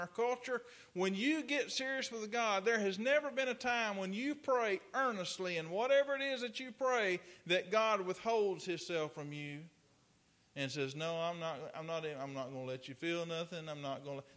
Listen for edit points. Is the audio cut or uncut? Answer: uncut